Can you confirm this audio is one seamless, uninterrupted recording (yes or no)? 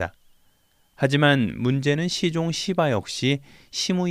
yes